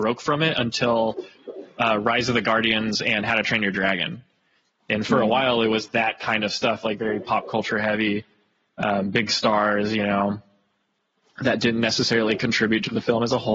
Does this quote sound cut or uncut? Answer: uncut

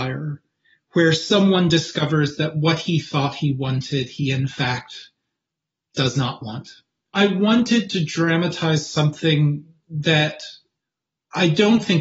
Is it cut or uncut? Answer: uncut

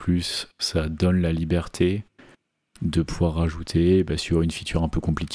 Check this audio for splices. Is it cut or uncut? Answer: uncut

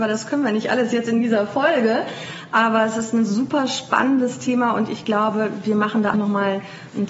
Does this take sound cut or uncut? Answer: cut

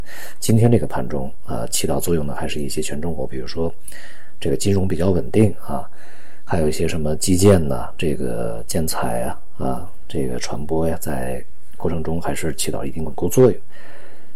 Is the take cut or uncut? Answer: cut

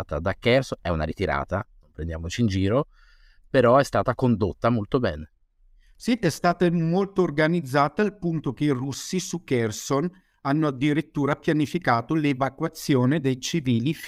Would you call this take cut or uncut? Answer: uncut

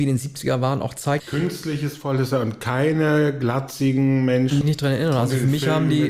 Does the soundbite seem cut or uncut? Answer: cut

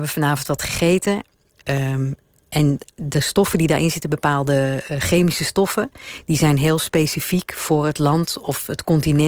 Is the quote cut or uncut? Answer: uncut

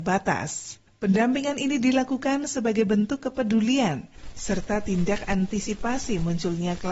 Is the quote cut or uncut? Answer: uncut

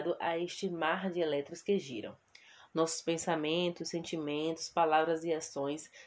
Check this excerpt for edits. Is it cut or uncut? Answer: uncut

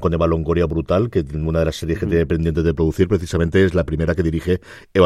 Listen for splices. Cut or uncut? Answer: uncut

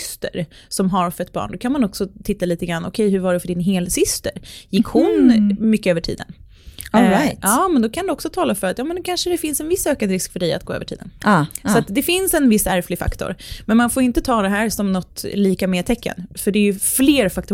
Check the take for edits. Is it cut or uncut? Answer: uncut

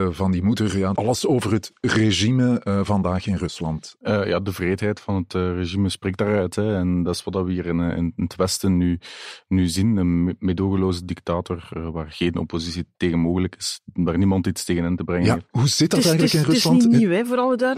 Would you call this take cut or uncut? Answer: cut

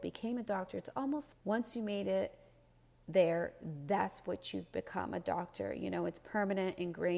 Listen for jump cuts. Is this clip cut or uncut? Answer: cut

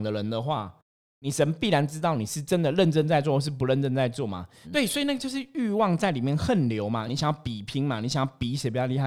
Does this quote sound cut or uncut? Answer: cut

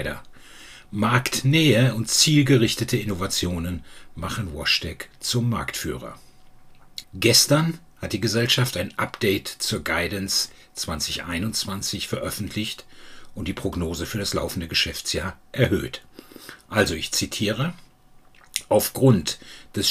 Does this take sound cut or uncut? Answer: cut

